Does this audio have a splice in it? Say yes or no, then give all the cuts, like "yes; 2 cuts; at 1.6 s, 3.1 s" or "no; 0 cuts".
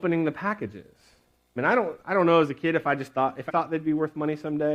yes; 2 cuts; at 1.6 s, 3.5 s